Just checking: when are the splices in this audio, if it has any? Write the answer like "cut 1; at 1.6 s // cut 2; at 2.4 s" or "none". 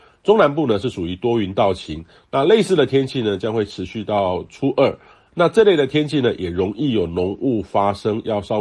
none